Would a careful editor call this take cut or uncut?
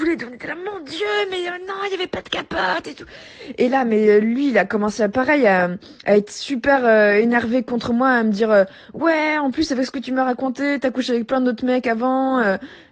uncut